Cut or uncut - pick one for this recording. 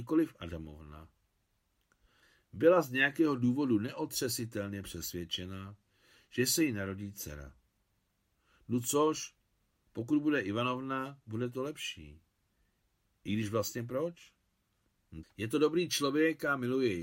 cut